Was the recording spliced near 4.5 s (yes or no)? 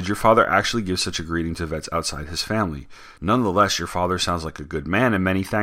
no